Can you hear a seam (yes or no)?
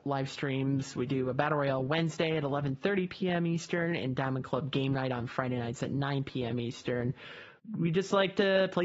no